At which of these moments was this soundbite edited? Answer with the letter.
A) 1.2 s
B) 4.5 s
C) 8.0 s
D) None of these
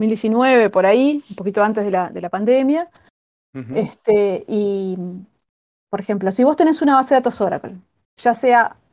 D